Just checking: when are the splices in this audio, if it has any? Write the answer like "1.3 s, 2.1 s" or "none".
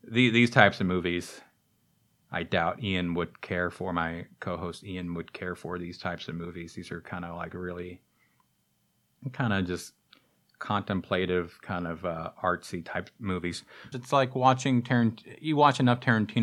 13.9 s